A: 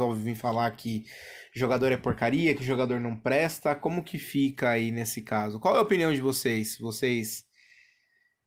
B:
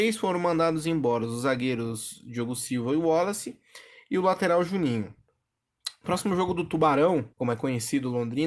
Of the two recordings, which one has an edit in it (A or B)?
B